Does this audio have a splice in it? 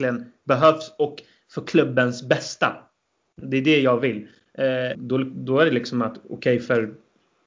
yes; 1 cut; at 4.9 s

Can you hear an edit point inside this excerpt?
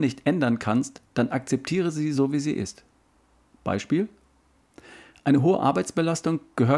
no; 0 cuts

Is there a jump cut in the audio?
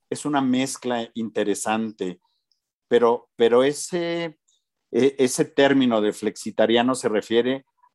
yes; 1 cut; at 2.8 s

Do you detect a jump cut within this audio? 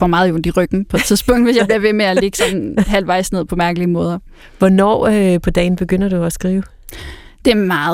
no; 0 cuts

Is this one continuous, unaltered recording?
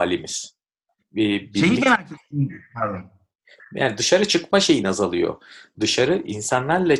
no; 1 cut; at 1.0 s

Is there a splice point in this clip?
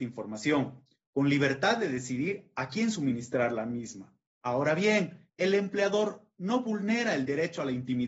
yes; 1 cut; at 5.3 s

